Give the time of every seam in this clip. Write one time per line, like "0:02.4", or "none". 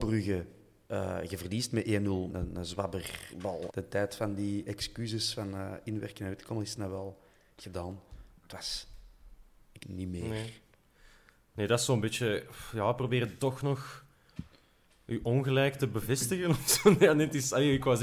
0:02.3
0:03.7
0:09.8

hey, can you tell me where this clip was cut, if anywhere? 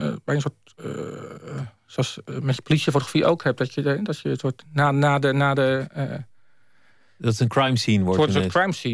none

